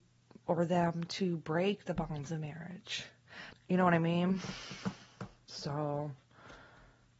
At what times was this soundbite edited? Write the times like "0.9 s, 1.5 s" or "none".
3.5 s